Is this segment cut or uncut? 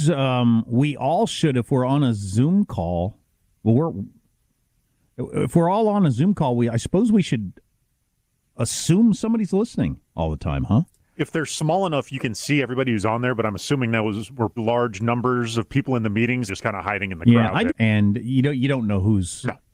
cut